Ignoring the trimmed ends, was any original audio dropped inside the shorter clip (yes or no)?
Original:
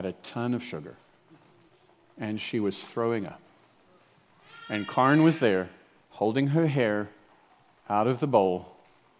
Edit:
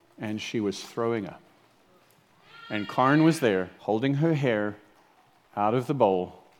yes